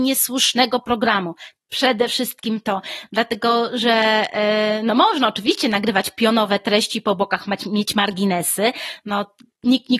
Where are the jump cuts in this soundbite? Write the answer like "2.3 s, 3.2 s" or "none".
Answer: 1.6 s